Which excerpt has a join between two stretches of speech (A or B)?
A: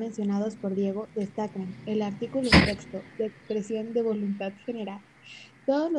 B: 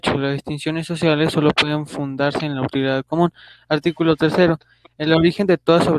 A